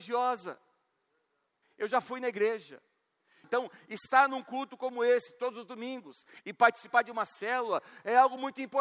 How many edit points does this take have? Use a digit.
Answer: 2